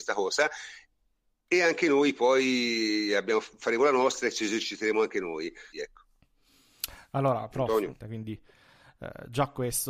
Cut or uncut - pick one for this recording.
cut